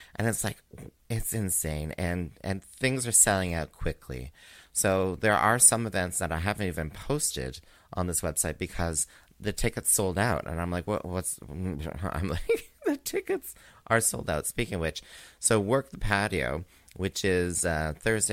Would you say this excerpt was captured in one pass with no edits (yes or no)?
yes